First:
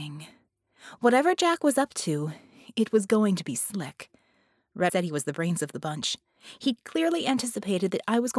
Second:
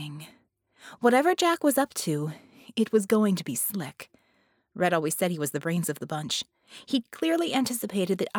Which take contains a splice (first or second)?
first